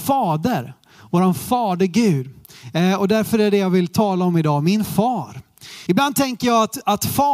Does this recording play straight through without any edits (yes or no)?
no